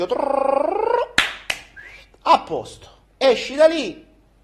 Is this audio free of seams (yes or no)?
no